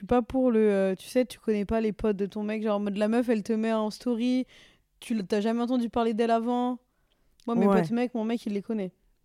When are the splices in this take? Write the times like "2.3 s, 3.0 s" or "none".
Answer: none